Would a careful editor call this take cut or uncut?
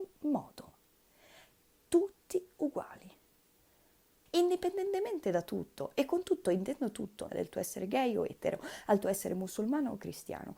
cut